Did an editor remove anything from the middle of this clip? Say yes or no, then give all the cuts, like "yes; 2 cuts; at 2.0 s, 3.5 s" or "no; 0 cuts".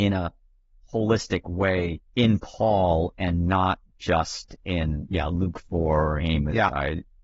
yes; 1 cut; at 2.1 s